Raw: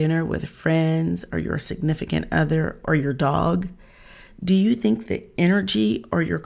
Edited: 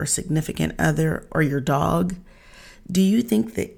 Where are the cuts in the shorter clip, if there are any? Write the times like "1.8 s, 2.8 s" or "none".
none